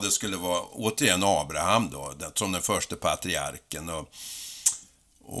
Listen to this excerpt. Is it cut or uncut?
uncut